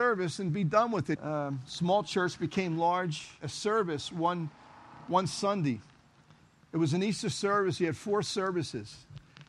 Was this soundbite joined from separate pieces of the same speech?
yes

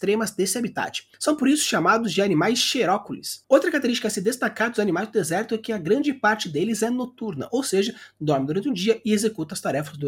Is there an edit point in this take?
no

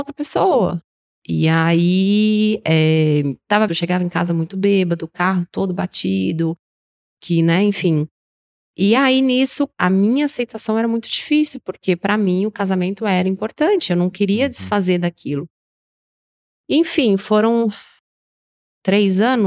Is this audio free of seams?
no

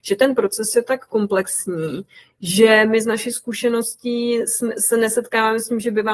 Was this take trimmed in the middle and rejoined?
no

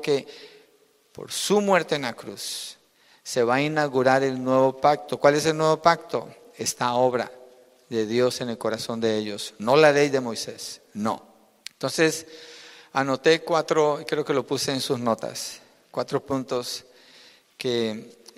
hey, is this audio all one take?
no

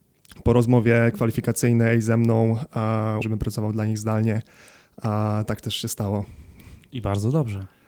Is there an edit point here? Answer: yes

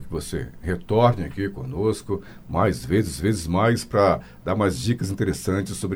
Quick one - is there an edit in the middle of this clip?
no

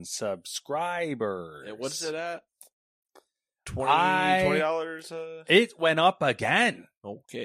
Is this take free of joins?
yes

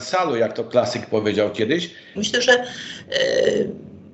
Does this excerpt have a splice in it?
yes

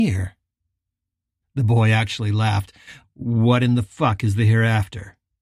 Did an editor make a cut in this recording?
yes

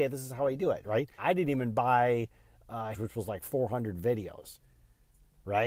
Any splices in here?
yes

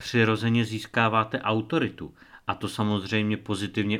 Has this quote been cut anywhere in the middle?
no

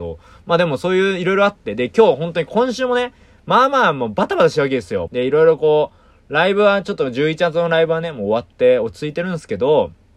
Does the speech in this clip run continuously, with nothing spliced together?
no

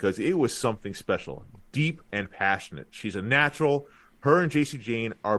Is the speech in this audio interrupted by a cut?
yes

